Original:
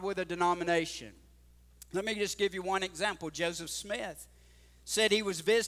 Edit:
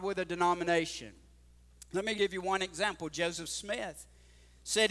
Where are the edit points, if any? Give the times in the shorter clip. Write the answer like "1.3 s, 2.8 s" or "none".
2.2 s

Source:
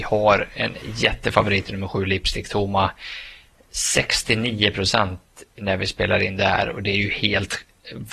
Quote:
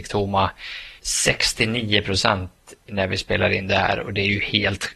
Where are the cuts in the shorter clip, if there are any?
1.0 s

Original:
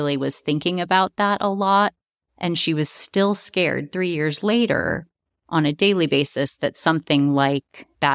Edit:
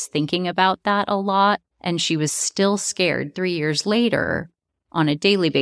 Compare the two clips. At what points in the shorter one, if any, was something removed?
1.7 s

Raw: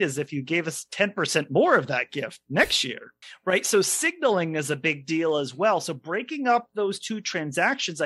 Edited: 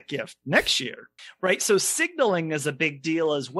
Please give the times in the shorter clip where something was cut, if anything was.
none

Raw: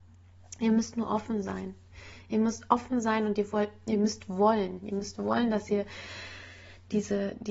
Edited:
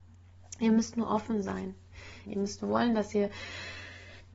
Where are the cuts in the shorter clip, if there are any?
2.2 s

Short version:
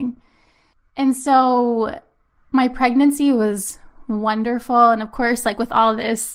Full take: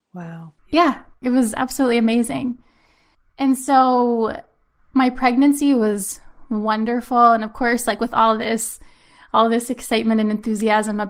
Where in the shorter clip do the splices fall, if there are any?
none

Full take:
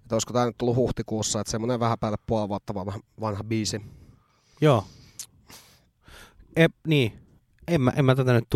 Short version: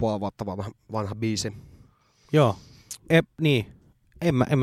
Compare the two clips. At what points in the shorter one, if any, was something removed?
3.0 s

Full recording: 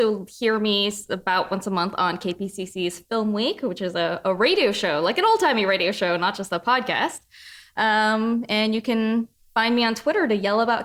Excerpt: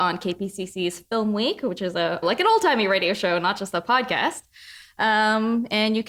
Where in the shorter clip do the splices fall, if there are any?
2.2 s

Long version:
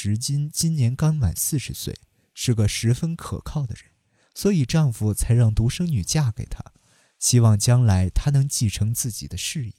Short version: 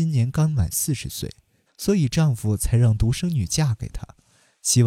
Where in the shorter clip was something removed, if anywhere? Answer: 1.7 s

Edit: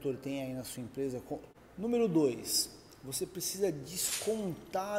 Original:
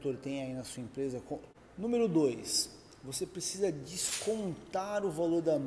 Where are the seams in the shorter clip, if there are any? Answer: none

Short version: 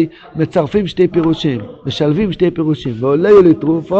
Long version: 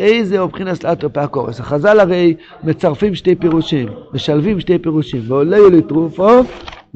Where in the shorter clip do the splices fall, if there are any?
none

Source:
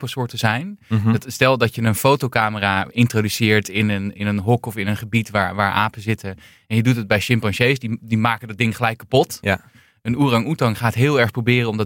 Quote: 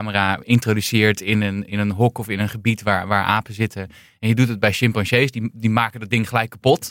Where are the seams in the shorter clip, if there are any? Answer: none

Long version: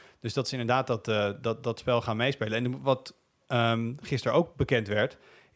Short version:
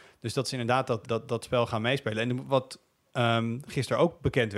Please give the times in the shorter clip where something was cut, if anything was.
1.0 s

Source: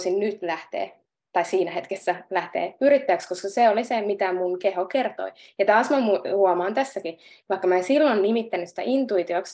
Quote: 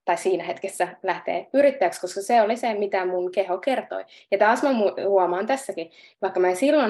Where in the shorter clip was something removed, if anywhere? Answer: none

